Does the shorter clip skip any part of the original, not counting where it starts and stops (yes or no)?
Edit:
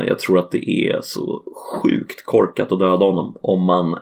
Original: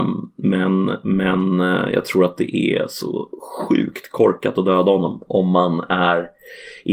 no